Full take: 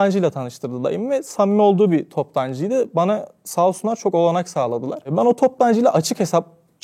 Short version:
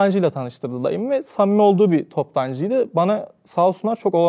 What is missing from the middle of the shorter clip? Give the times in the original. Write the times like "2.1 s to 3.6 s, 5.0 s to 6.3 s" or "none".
none